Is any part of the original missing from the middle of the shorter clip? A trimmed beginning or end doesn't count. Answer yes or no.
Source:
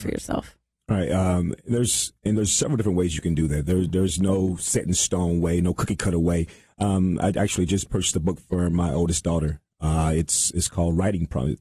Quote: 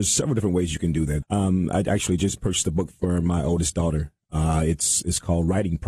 yes